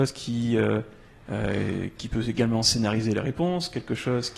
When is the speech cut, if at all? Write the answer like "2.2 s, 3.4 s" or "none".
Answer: 2.0 s